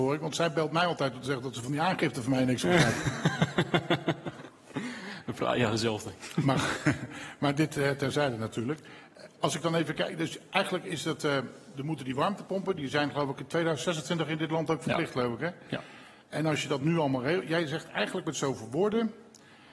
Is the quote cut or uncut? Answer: uncut